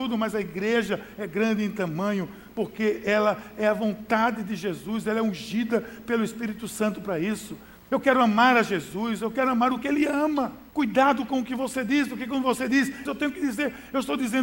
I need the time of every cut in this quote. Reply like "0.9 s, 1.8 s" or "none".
10.7 s, 13.1 s